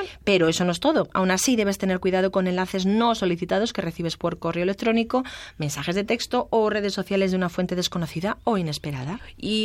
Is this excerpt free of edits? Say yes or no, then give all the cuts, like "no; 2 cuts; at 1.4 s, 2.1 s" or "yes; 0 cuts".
yes; 0 cuts